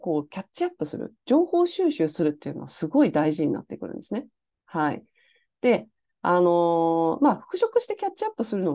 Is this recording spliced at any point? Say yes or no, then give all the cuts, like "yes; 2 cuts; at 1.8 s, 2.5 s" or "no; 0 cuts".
no; 0 cuts